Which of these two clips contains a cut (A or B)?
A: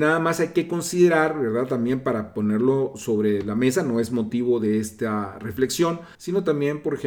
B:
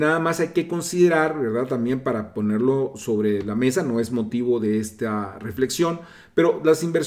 A